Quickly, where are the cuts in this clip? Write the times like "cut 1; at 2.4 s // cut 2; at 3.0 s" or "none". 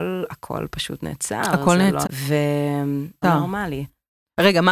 cut 1; at 2.0 s // cut 2; at 3.2 s